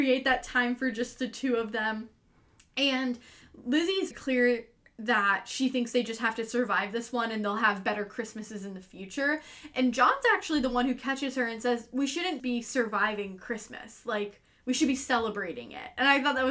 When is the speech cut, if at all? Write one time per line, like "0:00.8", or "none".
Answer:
0:04.1
0:12.4